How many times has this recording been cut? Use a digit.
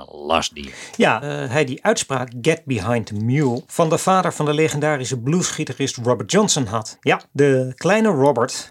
2